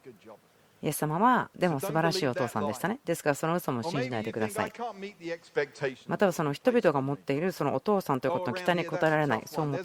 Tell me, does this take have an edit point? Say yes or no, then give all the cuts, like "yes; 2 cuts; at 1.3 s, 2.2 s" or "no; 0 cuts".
no; 0 cuts